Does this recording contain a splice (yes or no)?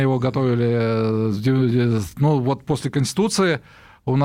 no